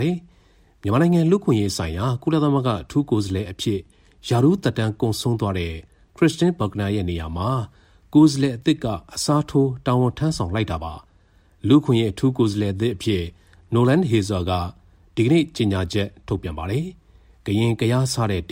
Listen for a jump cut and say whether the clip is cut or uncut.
uncut